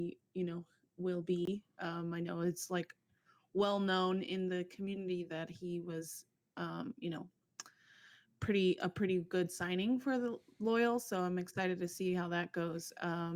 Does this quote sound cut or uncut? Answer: uncut